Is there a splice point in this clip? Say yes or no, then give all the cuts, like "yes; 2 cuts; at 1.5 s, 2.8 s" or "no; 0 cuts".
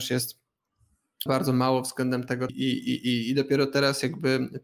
yes; 2 cuts; at 1.3 s, 2.5 s